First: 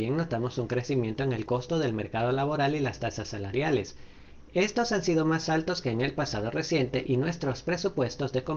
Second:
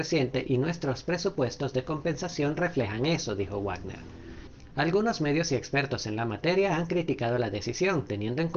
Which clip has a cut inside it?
second; 1 cut; at 4.7 s

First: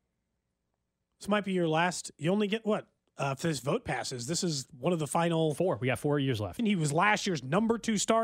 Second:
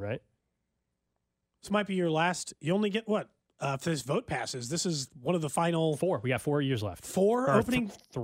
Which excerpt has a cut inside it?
first; 1 cut; at 6.6 s

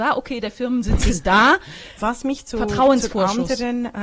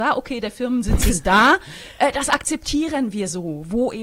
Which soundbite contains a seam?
first; 1 cut; at 2.0 s

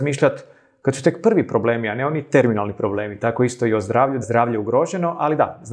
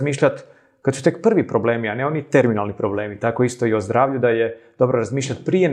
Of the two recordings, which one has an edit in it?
first; 1 cut; at 4.2 s

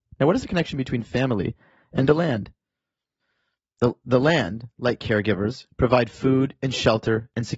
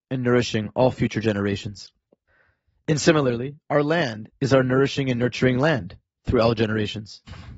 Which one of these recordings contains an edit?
second; 1 cut; at 4.3 s

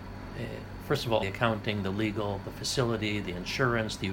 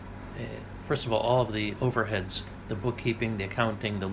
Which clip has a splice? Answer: first; 1 cut; at 1.2 s

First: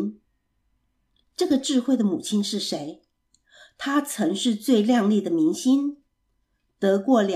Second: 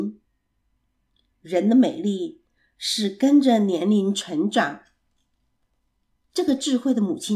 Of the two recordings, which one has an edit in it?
first; 1 cut; at 1.2 s

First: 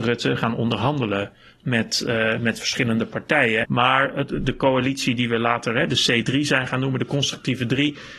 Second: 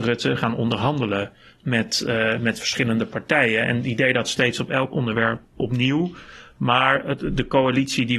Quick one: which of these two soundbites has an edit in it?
first; 1 cut; at 3.6 s

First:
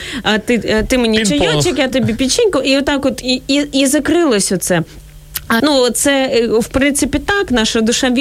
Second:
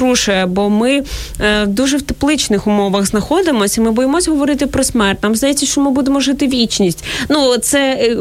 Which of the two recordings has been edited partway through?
first; 1 cut; at 5.6 s

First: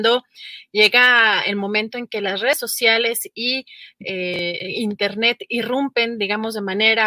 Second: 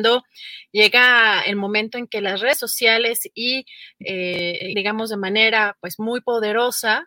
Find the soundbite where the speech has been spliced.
second; 1 cut; at 4.7 s

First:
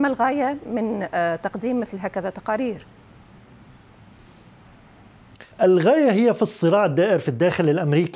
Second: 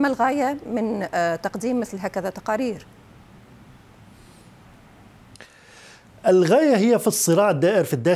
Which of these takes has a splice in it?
first; 1 cut; at 5.5 s

